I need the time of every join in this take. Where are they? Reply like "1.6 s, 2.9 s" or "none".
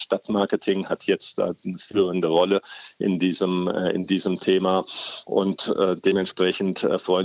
none